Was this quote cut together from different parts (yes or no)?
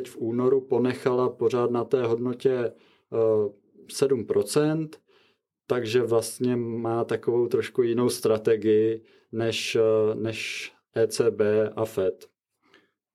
no